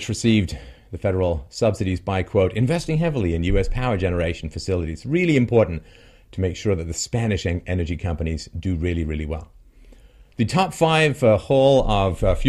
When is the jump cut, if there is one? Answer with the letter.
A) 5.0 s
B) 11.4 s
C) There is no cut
C